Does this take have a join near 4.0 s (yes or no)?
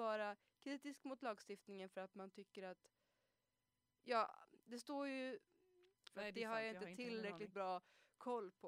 no